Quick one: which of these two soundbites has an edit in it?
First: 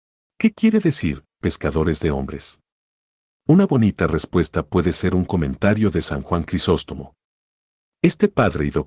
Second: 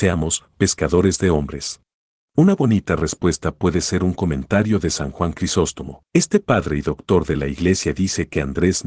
second; 2 cuts; at 2.2 s, 6.1 s

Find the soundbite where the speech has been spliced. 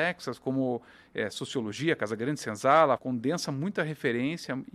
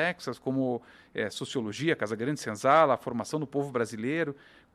first; 1 cut; at 3.0 s

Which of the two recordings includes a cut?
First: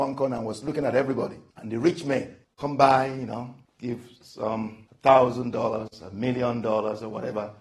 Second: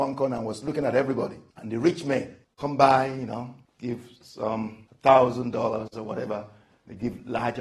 second; 1 cut; at 5.9 s

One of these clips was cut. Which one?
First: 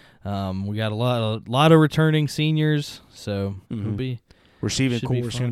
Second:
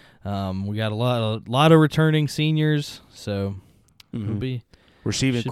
first; 1 cut; at 3.6 s

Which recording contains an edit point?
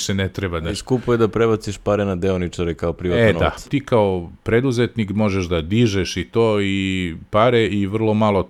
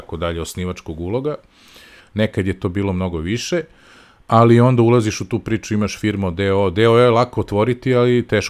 first; 1 cut; at 3.6 s

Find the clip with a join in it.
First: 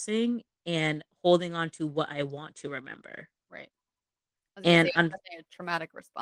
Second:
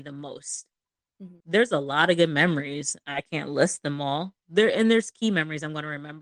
second; 1 cut; at 1.4 s

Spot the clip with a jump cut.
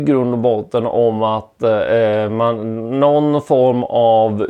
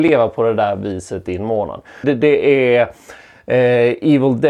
second; 1 cut; at 2.0 s

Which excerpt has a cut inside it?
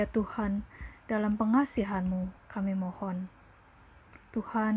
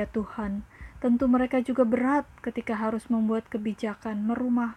first; 2 cuts; at 0.9 s, 2.4 s

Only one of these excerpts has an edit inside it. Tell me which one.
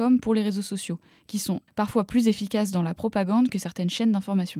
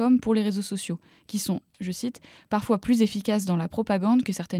first; 1 cut; at 1.7 s

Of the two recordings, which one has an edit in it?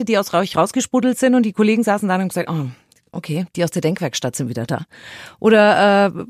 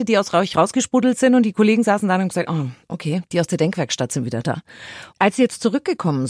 second; 2 cuts; at 2.8 s, 5.1 s

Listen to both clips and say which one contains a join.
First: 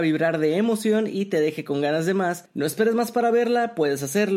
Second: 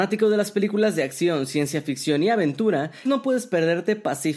second; 1 cut; at 3.1 s

